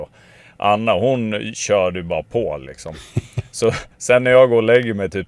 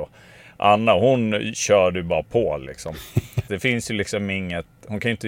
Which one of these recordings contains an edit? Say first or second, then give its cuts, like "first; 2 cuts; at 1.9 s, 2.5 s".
second; 1 cut; at 3.5 s